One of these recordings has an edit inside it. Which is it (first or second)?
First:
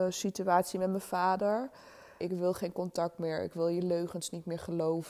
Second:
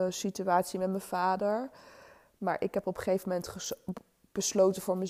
first